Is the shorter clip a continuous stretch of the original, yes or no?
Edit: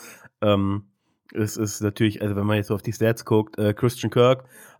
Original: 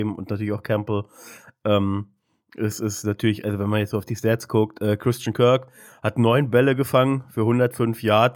yes